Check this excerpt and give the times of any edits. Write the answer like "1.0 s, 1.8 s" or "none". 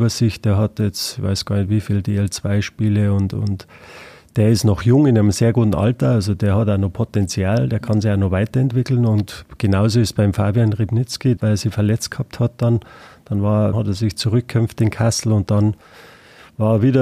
11.4 s, 13.7 s